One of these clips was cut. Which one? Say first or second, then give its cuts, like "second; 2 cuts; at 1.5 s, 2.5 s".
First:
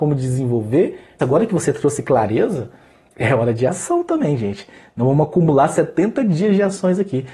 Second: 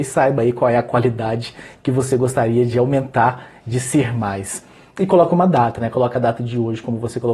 first; 1 cut; at 1.2 s